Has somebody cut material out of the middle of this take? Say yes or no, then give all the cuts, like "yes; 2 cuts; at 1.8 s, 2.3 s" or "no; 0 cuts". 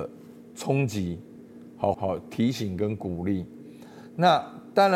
yes; 1 cut; at 1.9 s